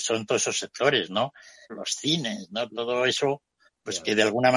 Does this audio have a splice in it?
yes; 1 cut; at 1.7 s

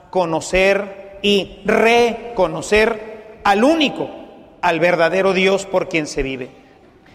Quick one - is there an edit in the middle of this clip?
no; 0 cuts

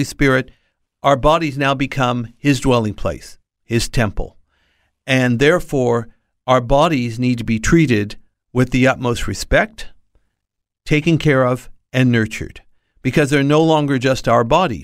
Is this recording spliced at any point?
no; 0 cuts

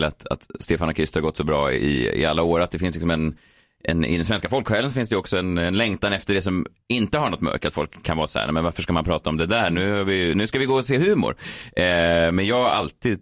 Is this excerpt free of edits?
yes; 0 cuts

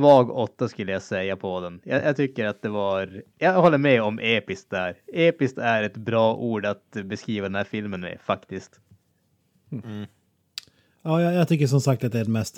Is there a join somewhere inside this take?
no; 0 cuts

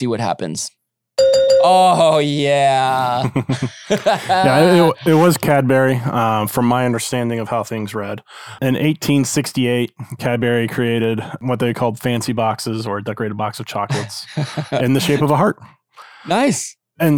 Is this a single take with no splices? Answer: yes; 0 cuts

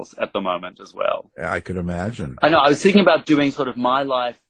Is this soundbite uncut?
no; 1 cut; at 2.4 s

